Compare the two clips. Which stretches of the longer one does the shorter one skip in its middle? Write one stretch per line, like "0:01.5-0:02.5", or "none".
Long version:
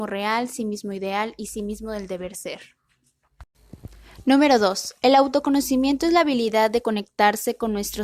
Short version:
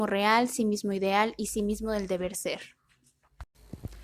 none